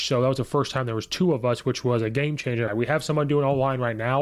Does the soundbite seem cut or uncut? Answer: cut